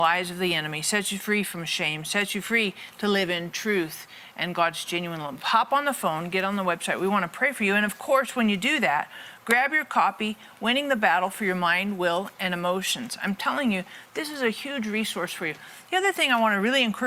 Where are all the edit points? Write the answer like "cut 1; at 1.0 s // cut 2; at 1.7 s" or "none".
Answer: none